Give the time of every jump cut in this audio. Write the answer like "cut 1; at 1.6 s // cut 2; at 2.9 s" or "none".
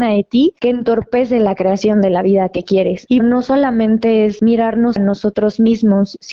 cut 1; at 3.2 s